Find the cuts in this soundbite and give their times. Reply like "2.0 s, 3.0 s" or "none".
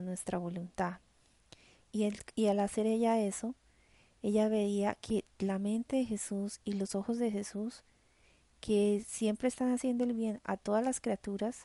1.9 s